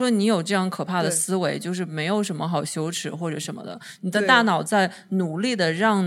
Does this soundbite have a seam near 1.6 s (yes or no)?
no